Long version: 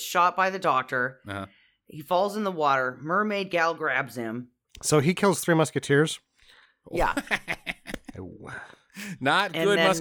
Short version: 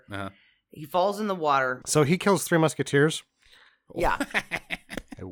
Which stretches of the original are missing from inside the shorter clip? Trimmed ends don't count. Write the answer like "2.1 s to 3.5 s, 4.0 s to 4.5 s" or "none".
3.0 s to 4.8 s